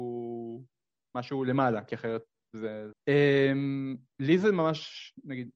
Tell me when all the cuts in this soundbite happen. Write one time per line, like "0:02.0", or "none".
0:02.9